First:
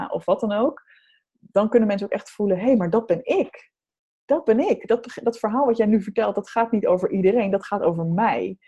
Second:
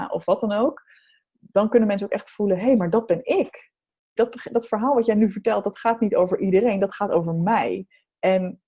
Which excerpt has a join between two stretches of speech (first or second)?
second